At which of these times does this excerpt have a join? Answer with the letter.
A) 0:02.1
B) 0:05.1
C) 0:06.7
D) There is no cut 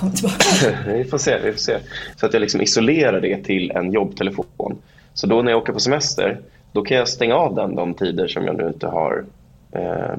A